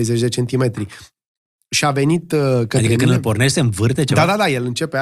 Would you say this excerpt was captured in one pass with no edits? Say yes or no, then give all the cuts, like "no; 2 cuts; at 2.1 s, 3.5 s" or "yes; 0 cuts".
no; 1 cut; at 1.6 s